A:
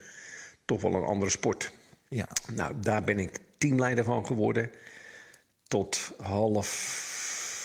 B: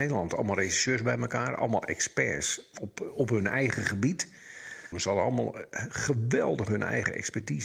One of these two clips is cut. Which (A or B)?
B